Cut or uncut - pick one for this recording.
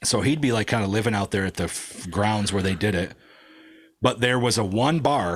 uncut